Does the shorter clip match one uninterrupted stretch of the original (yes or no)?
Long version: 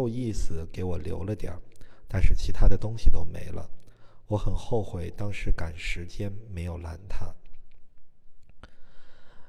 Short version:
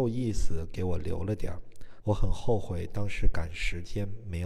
no